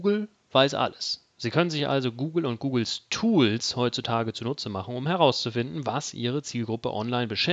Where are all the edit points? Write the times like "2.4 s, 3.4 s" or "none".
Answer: none